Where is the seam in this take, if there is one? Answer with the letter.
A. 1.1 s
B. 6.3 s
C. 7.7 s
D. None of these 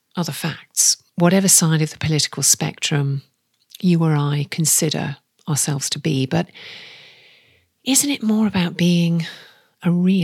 A